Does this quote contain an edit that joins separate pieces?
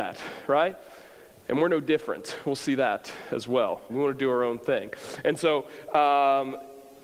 yes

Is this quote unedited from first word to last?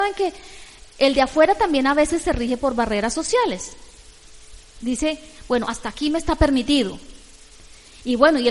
yes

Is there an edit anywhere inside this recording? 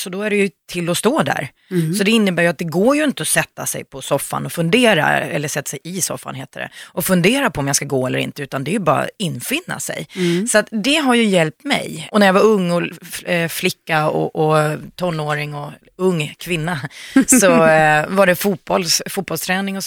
no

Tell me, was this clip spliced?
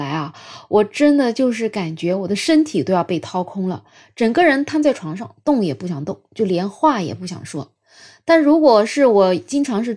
no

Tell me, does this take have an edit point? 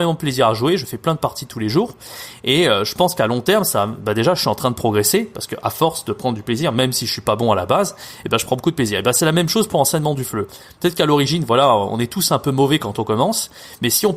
no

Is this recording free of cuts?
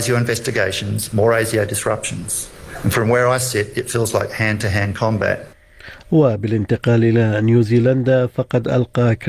yes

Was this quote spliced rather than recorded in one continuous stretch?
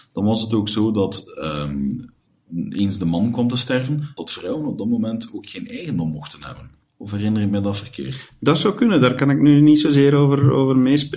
yes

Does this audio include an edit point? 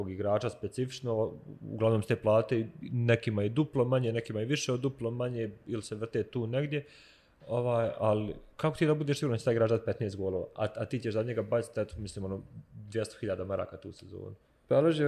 no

